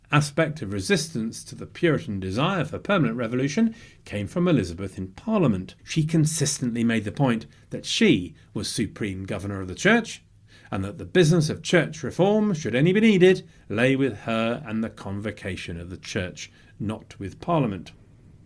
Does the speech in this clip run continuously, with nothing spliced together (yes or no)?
no